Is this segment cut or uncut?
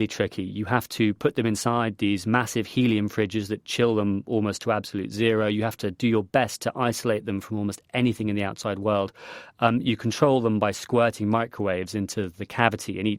uncut